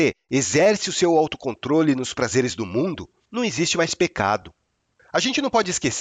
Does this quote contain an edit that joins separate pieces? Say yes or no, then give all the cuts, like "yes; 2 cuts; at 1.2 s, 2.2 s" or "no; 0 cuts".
no; 0 cuts